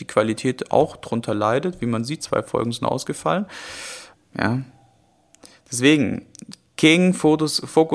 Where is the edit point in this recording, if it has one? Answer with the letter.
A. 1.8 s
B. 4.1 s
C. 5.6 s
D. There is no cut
B